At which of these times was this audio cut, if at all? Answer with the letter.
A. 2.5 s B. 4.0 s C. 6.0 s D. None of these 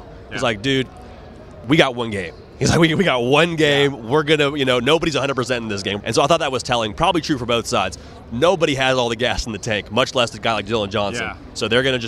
C